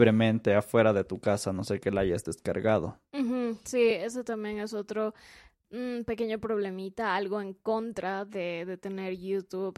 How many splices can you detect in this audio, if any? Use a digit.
0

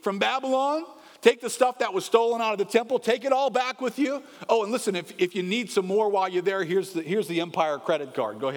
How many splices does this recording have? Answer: 0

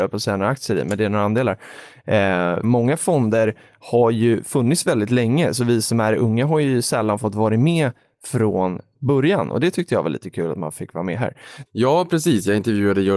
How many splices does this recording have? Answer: 2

